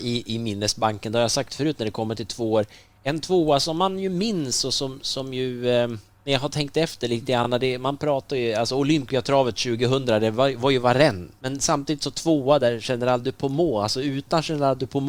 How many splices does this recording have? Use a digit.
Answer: 0